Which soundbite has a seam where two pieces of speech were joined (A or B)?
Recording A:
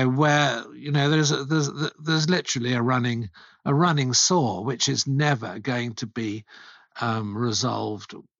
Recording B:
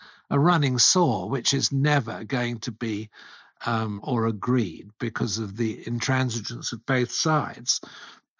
B